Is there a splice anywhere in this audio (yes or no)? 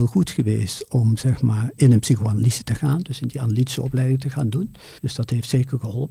yes